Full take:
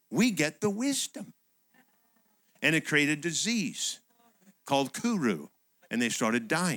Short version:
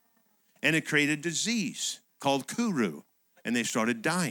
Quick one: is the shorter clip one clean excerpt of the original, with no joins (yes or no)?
no